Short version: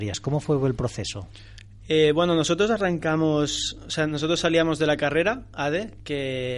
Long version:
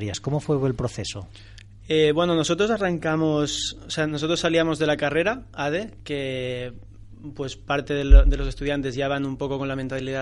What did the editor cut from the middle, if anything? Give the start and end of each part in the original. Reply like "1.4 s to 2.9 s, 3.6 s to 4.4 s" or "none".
none